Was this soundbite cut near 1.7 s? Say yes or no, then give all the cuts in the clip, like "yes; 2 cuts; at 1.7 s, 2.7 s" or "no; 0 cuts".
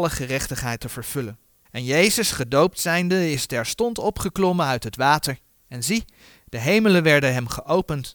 yes; 1 cut; at 1.7 s